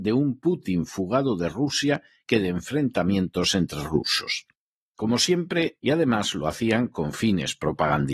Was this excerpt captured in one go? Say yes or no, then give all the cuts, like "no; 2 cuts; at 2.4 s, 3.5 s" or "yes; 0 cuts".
no; 1 cut; at 5.8 s